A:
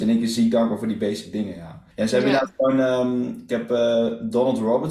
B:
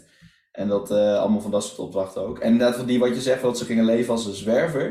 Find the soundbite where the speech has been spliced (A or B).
A